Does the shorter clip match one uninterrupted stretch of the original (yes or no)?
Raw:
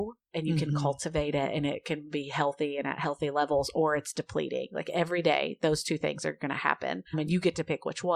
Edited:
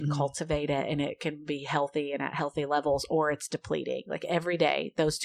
yes